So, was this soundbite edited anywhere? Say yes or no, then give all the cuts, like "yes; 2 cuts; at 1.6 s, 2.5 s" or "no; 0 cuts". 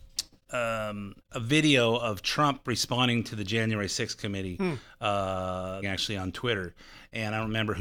yes; 2 cuts; at 1.2 s, 5.8 s